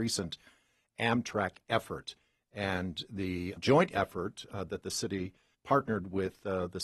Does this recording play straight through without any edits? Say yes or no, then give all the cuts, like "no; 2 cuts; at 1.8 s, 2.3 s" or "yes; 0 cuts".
no; 1 cut; at 3.6 s